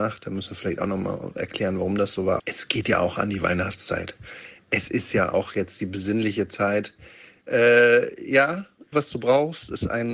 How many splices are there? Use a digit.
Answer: 3